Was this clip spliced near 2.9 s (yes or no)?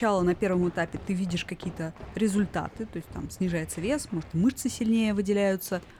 no